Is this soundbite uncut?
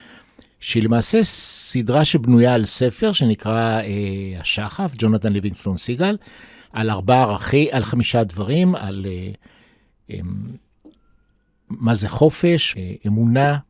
no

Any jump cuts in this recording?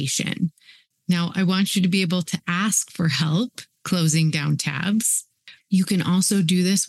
yes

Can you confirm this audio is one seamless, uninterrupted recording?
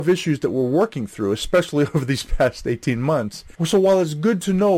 no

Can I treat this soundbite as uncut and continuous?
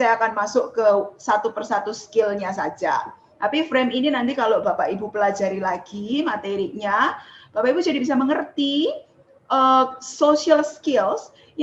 yes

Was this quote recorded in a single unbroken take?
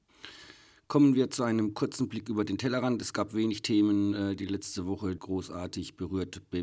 no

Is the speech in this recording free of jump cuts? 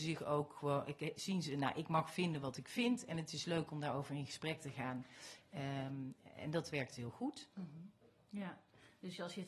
yes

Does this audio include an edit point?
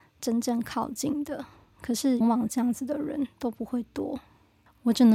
yes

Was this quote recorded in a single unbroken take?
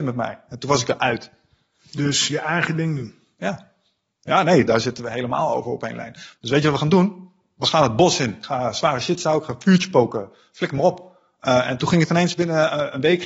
no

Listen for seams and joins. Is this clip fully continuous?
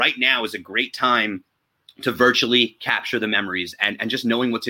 yes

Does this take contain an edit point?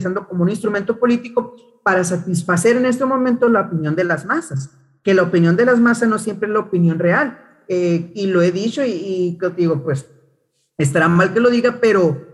no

